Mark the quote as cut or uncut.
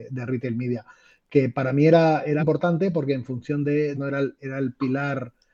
cut